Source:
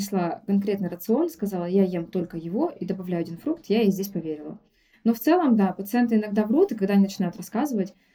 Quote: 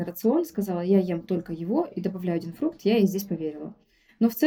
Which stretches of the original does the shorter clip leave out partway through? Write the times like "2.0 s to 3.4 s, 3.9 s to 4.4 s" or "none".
none